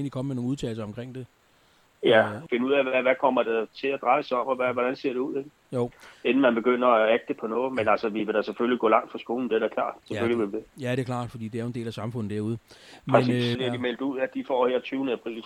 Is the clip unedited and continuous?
no; 2 cuts; at 2.5 s, 13.6 s

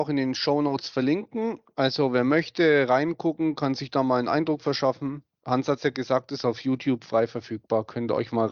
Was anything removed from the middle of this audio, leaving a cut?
no; 0 cuts

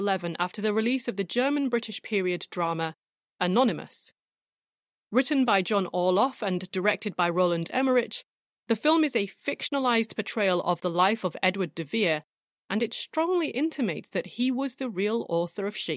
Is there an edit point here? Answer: no; 0 cuts

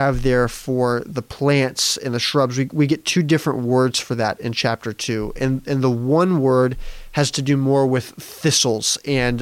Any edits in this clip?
no; 0 cuts

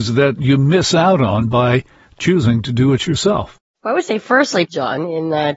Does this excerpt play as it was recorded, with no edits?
no; 1 cut; at 4.7 s

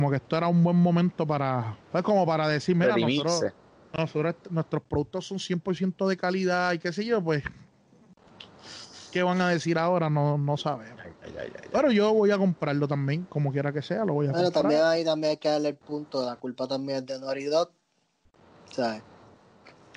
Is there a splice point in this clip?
yes; 1 cut; at 1.8 s

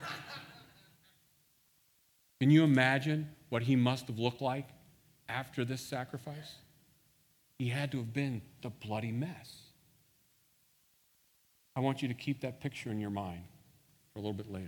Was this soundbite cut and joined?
yes; 1 cut; at 8.6 s

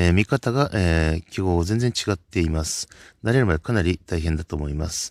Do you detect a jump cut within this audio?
no; 0 cuts

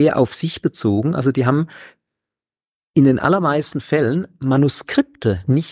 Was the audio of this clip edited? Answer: no; 0 cuts

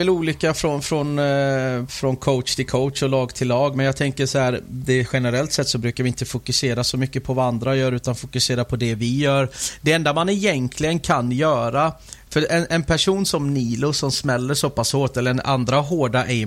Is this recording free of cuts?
yes; 0 cuts

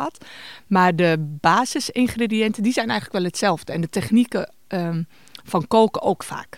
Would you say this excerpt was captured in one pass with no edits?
yes; 0 cuts

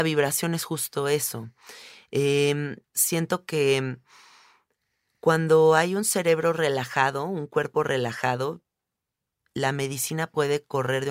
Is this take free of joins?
no; 1 cut; at 2.8 s

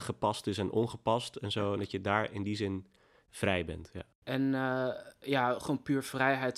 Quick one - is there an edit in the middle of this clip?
no; 0 cuts

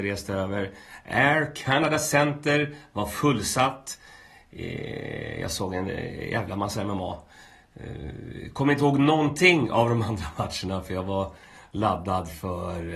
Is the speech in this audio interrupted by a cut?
no; 0 cuts

